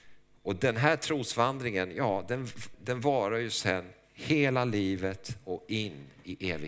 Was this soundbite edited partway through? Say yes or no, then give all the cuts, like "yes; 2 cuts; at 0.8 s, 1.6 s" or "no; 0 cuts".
yes; 1 cut; at 2.7 s